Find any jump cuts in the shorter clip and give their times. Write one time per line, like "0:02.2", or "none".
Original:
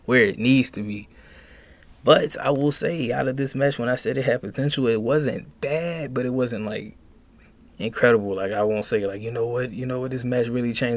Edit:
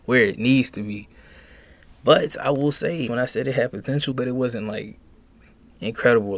0:03.1
0:04.1